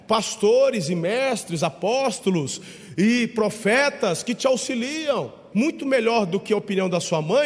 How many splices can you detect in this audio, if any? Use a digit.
1